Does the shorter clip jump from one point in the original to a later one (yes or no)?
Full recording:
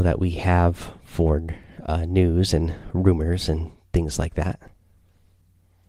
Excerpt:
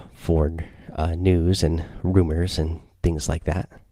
no